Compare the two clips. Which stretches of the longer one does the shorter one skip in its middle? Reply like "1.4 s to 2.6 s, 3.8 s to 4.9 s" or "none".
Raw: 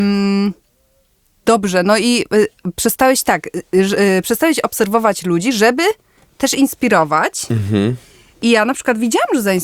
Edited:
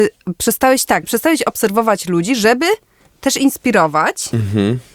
3.4 s to 4.2 s